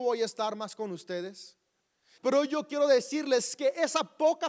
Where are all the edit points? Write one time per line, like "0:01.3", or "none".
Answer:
0:02.2